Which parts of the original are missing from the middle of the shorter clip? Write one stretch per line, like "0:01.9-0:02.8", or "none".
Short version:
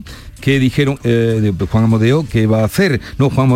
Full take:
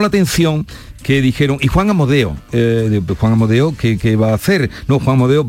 0:01.6-0:02.5
0:03.8-0:04.0